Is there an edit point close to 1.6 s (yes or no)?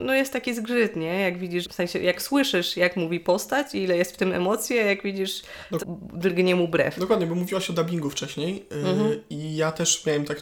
yes